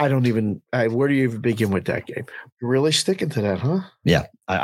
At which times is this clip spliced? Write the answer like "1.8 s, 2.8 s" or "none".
2.5 s